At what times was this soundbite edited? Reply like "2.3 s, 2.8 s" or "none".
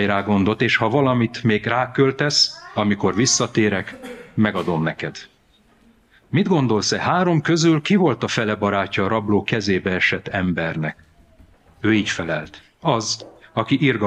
none

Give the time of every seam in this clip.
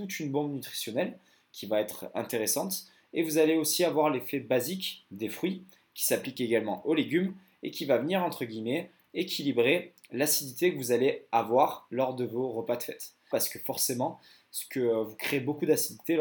13.3 s

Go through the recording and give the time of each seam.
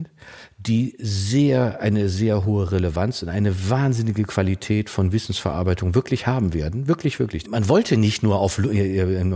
7.4 s

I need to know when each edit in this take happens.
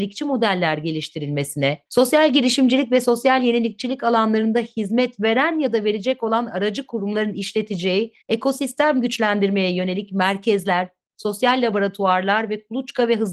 1.9 s, 8.2 s

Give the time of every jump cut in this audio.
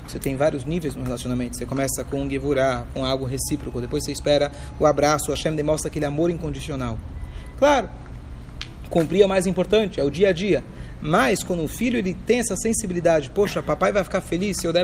7.5 s

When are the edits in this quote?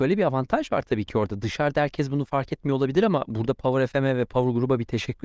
none

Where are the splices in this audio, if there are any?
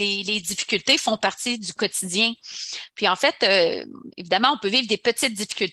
none

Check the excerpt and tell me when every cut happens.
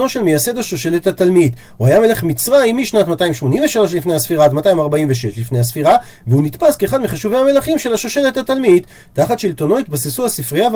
none

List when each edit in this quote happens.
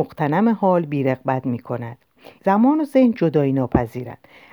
2.4 s

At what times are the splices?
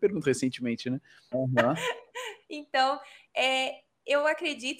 1.3 s

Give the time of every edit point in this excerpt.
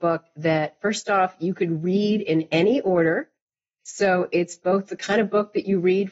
none

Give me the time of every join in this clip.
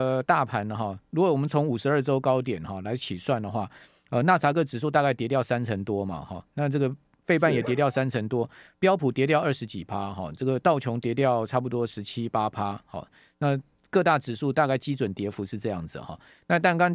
none

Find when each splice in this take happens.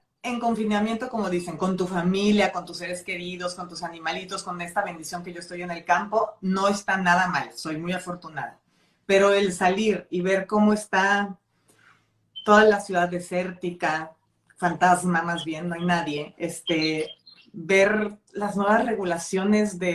none

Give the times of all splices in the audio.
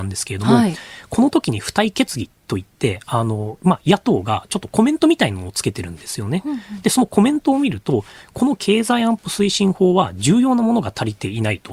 none

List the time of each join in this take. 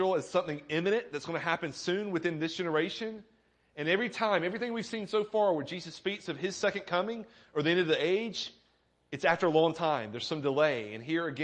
none

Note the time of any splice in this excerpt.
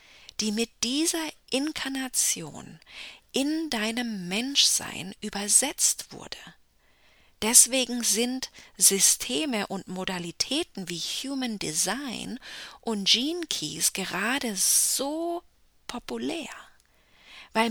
none

